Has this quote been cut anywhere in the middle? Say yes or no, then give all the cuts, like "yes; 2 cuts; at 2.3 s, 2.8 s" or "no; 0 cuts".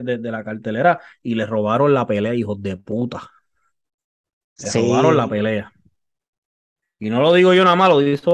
no; 0 cuts